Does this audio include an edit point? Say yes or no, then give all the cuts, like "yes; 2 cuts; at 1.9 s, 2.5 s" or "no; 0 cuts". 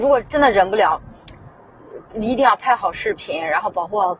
no; 0 cuts